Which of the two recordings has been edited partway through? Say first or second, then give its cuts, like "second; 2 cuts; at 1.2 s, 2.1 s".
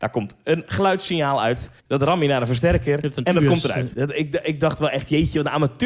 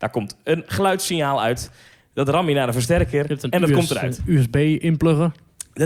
first; 2 cuts; at 1.8 s, 3.9 s